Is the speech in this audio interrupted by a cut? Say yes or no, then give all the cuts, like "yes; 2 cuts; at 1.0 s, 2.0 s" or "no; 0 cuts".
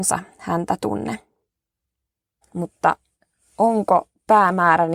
yes; 1 cut; at 2.4 s